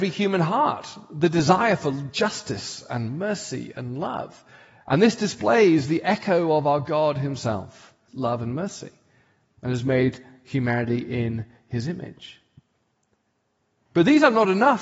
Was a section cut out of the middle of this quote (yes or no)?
yes